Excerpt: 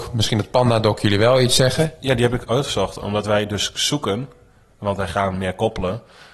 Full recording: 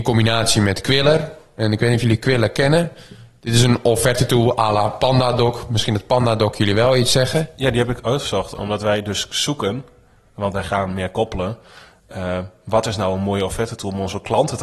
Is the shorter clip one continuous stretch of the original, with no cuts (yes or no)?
yes